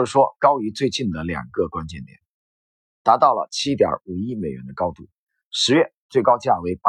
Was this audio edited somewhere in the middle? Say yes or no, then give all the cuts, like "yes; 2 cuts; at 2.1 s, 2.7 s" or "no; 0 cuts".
yes; 1 cut; at 2.9 s